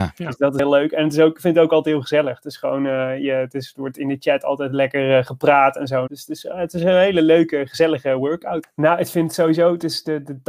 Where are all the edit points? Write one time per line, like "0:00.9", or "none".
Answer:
0:06.1
0:08.6